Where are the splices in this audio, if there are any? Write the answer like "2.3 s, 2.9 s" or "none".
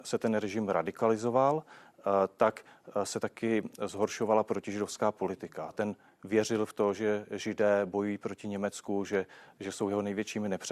5.7 s